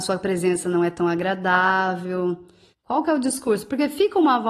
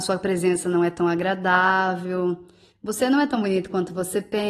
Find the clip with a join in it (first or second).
first